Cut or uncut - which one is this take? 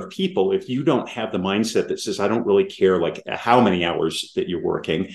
uncut